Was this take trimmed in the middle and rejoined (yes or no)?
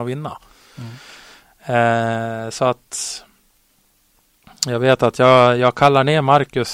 no